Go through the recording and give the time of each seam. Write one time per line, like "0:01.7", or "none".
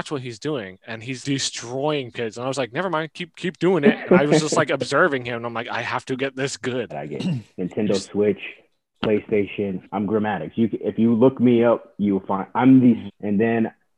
0:01.2
0:06.9
0:13.1